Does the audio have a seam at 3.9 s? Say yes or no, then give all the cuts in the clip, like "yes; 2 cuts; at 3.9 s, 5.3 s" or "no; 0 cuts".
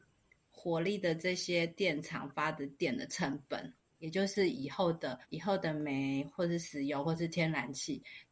yes; 2 cuts; at 3.9 s, 5.2 s